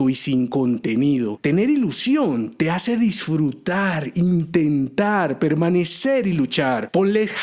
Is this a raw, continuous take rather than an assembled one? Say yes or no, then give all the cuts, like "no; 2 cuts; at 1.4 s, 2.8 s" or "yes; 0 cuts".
yes; 0 cuts